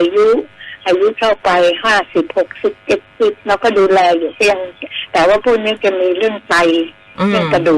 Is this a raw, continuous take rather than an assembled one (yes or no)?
no